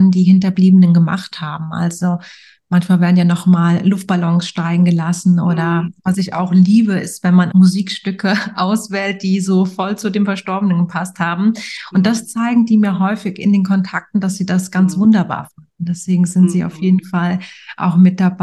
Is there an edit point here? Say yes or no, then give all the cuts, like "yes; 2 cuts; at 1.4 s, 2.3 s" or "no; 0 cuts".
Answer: yes; 1 cut; at 7.5 s